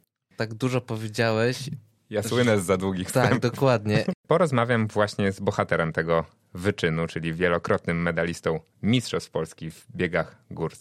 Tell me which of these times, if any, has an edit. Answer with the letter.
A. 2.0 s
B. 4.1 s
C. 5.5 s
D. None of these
B